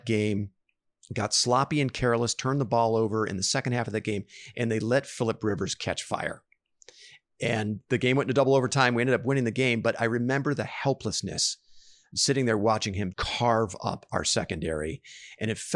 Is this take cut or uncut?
cut